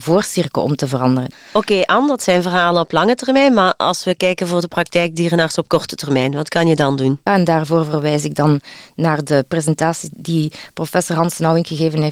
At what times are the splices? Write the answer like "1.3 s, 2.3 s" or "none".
1.3 s, 7.3 s